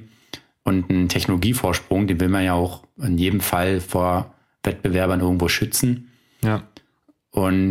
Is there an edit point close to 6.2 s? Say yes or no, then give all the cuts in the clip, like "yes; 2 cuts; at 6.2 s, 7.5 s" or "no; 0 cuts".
no; 0 cuts